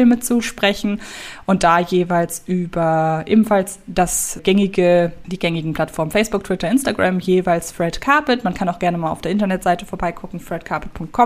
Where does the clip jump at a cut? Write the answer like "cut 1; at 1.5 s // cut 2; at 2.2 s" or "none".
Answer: cut 1; at 4.4 s